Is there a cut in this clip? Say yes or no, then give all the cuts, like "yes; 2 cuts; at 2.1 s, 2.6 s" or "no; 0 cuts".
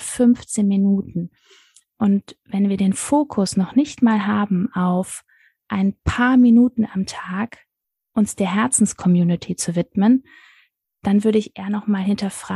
no; 0 cuts